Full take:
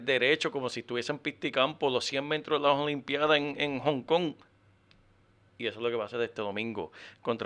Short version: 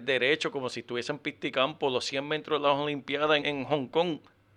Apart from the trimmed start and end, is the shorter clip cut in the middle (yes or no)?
yes